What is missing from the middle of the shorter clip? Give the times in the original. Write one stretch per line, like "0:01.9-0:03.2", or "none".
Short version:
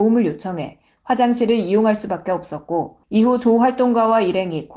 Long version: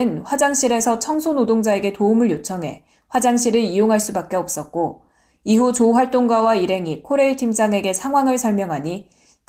0:05.1-0:05.4